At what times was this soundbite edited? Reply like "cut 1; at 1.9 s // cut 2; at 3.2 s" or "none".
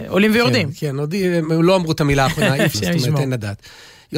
cut 1; at 2.7 s